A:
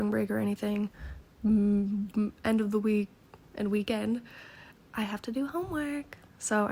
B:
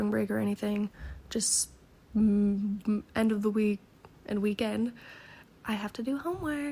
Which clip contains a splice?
A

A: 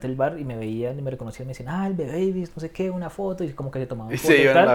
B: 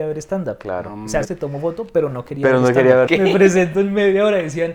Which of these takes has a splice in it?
B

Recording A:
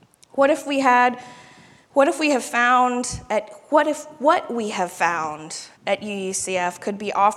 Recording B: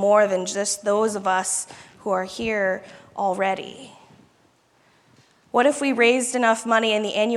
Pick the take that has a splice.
A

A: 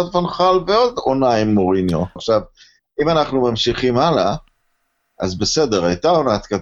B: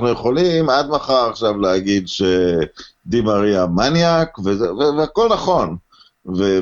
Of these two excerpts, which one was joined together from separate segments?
A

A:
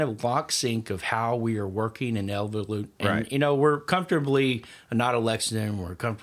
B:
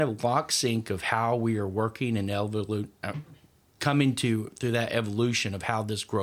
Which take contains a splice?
A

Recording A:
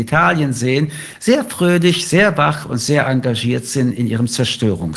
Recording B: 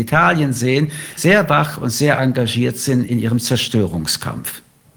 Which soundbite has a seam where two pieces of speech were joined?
B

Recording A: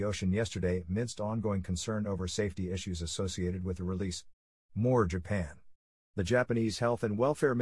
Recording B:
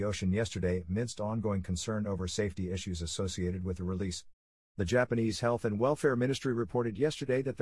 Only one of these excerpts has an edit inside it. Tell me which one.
B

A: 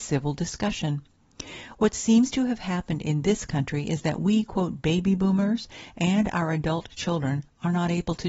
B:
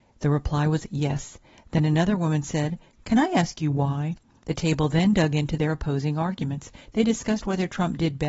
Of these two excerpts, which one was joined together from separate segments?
B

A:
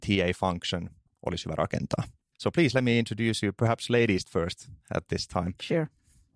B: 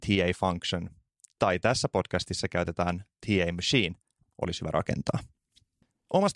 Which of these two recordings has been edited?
A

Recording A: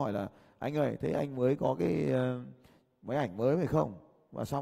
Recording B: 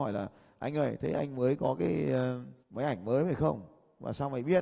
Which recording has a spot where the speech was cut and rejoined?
B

